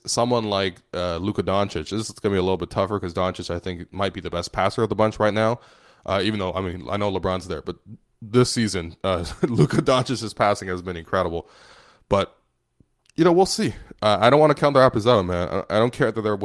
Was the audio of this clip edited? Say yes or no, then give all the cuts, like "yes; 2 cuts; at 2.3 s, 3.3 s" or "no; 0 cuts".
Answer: no; 0 cuts